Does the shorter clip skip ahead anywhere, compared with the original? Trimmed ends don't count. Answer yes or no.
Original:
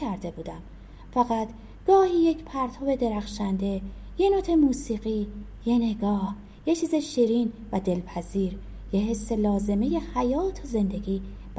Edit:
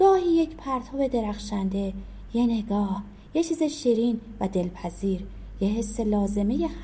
yes